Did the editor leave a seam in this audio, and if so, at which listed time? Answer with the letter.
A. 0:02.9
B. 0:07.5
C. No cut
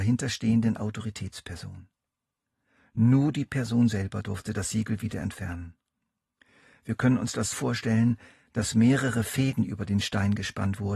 B